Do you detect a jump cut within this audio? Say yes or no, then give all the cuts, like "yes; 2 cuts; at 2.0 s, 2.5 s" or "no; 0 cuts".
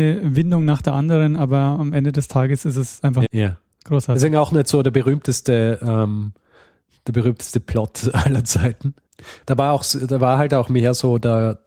yes; 2 cuts; at 3.3 s, 9.4 s